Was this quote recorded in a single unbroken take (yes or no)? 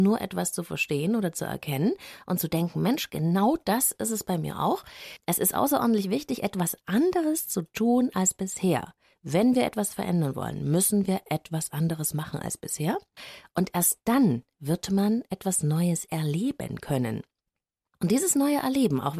yes